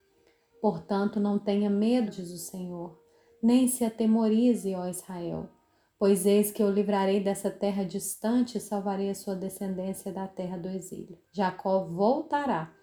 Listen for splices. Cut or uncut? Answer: cut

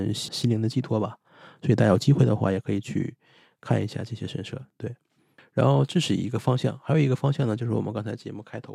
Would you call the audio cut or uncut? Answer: uncut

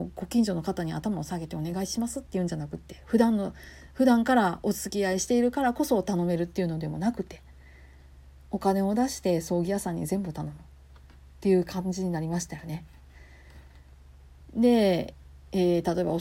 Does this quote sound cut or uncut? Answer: cut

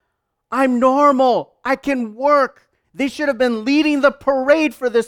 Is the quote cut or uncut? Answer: cut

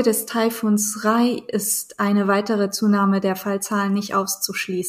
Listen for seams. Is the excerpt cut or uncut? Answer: uncut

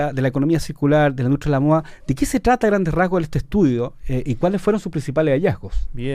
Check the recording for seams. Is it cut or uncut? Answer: uncut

